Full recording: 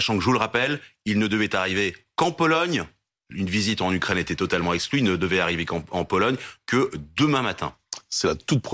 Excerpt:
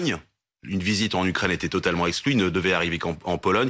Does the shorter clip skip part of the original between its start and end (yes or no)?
no